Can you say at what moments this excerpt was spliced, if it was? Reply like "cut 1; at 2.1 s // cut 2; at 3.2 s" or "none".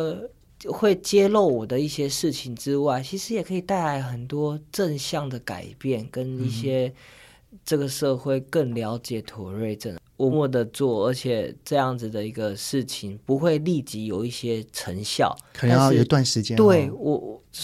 cut 1; at 10.3 s